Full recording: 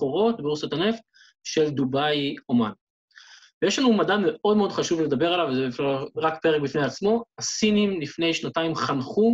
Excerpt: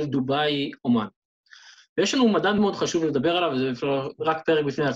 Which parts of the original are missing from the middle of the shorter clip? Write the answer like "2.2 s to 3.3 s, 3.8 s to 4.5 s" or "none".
4.2 s to 4.5 s